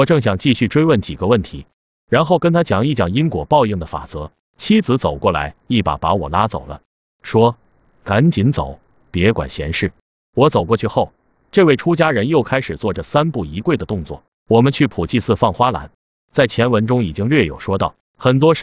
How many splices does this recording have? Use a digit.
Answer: 1